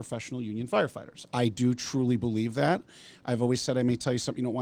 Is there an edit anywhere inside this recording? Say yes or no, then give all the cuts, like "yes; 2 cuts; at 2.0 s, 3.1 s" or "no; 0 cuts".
no; 0 cuts